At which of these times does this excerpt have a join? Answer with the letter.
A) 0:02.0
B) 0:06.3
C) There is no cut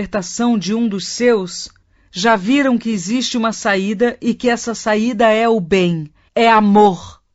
B